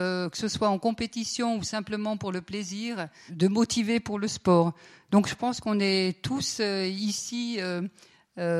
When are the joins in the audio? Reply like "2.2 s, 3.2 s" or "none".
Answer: 3.3 s